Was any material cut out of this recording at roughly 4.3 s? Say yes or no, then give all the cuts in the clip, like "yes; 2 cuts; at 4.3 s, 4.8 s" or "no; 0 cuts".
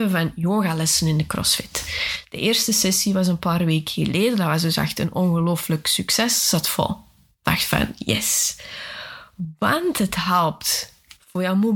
no; 0 cuts